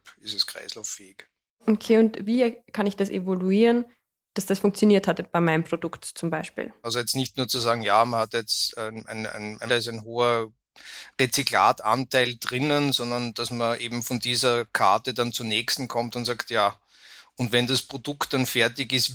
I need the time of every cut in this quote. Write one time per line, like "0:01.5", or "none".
0:06.8
0:09.7